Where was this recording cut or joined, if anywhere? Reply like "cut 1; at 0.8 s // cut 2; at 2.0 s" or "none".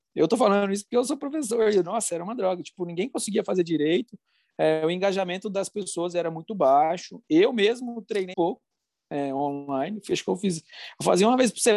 cut 1; at 8.3 s